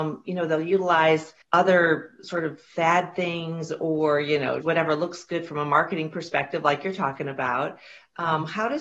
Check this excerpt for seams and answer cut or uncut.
cut